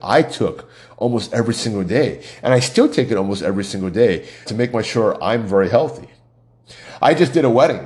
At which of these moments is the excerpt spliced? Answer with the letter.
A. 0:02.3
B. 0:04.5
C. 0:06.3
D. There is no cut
B